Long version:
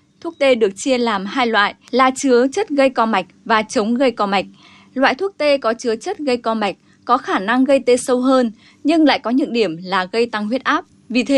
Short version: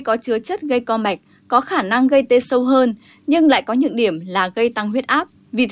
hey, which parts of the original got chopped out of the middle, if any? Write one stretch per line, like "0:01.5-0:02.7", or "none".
none

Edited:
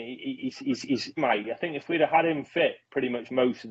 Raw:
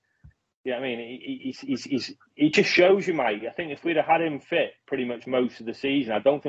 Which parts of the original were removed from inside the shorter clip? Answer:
0:02.2-0:03.1

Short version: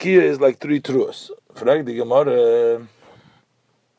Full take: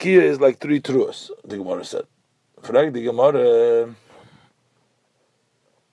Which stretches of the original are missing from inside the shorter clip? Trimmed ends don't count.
0:01.4-0:02.5

